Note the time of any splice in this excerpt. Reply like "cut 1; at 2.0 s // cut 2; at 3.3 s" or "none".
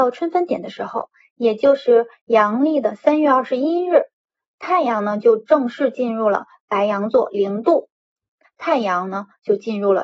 cut 1; at 8.4 s